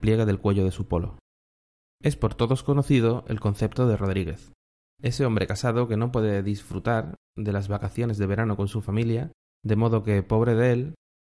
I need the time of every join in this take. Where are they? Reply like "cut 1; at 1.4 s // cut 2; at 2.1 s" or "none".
none